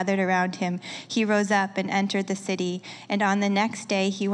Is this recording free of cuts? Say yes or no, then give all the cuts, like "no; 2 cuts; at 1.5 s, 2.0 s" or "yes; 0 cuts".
yes; 0 cuts